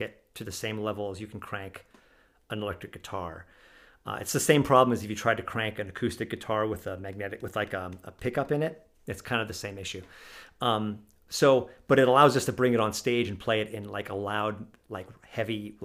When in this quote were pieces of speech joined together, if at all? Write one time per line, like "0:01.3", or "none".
none